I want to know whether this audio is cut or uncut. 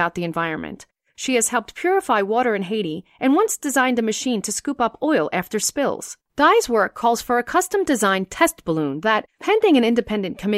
cut